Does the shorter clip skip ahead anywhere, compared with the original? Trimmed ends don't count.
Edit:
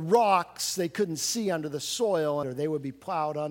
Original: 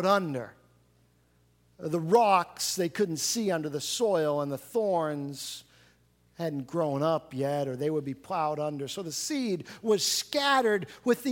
yes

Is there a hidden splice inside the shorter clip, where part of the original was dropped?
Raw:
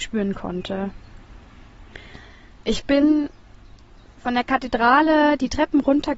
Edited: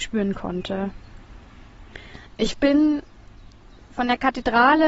yes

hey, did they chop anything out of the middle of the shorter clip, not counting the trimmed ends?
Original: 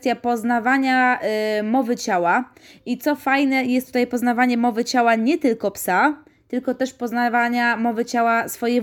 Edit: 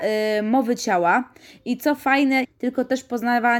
yes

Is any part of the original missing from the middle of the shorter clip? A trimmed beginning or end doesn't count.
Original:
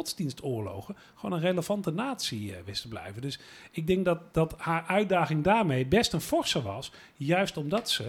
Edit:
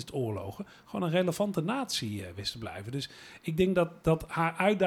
no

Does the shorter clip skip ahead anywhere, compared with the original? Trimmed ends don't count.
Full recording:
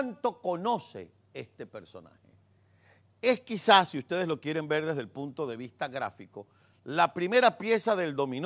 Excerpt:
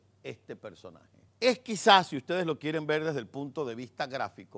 yes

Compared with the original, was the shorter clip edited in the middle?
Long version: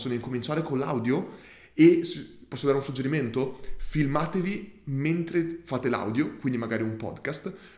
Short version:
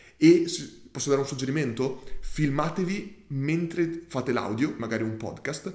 yes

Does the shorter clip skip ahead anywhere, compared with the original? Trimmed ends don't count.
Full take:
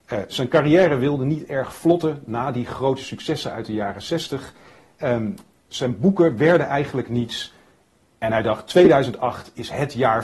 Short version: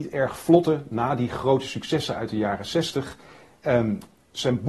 no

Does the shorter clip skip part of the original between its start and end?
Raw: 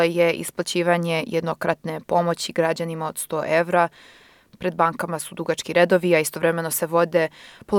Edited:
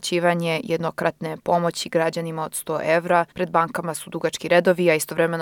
yes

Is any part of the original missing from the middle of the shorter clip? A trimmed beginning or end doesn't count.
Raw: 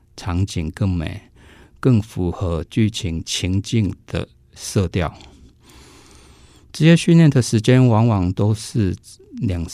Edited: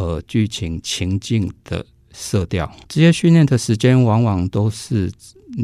yes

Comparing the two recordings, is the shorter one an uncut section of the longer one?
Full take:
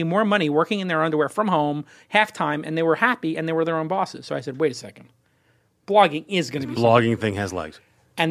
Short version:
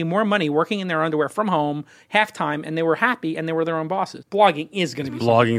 no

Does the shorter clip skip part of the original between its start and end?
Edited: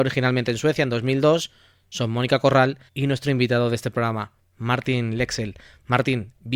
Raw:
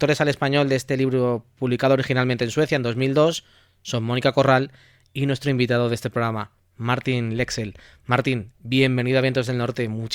yes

